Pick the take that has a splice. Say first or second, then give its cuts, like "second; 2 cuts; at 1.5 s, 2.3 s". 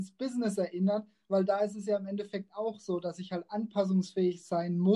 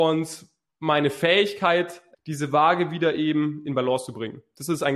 second; 1 cut; at 2.1 s